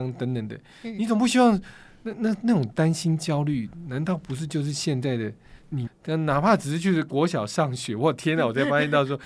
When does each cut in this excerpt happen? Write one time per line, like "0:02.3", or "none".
0:05.9